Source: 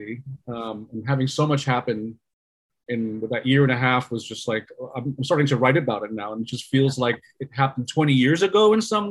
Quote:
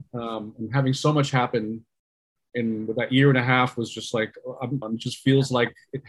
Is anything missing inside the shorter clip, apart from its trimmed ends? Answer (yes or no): yes